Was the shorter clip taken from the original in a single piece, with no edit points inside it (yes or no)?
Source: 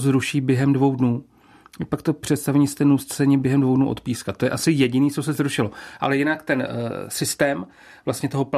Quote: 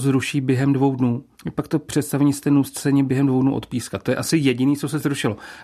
no